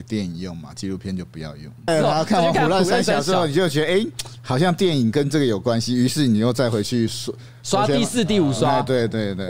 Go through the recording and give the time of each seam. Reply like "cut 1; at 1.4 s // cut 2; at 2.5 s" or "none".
cut 1; at 1.9 s